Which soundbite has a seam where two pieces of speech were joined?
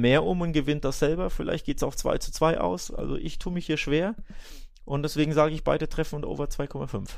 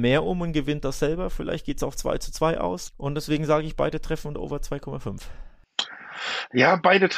second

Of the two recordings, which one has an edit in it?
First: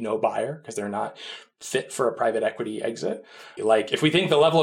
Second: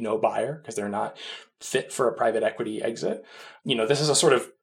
first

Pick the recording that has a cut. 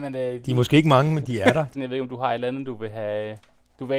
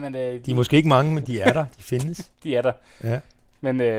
first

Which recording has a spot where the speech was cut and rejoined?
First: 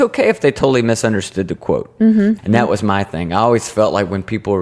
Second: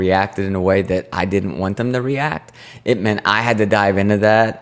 first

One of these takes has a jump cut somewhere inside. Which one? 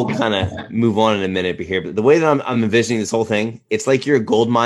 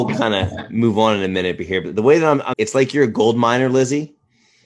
second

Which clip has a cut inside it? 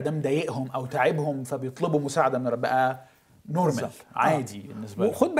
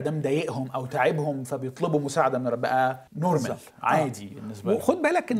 second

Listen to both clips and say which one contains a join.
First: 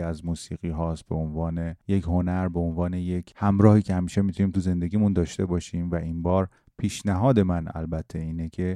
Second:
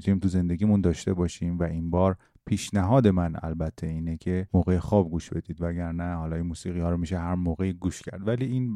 first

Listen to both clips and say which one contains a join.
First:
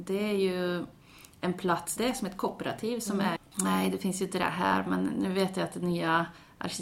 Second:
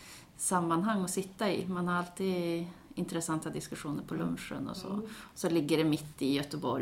first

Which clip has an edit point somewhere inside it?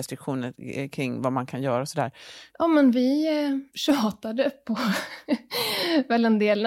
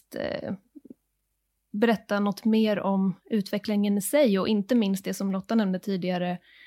first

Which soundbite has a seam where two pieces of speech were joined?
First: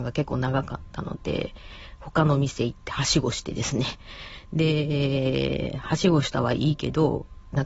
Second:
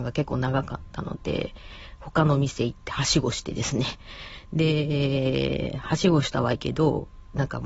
second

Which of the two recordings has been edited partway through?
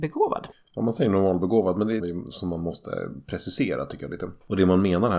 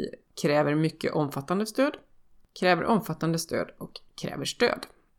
first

